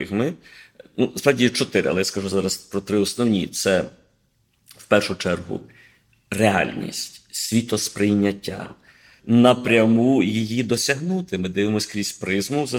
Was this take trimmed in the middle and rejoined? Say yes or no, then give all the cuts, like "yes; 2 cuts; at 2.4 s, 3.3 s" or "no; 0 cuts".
yes; 1 cut; at 9.2 s